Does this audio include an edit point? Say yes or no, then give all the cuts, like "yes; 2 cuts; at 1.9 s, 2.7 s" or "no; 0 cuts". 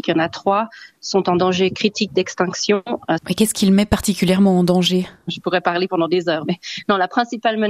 yes; 2 cuts; at 3.2 s, 6.5 s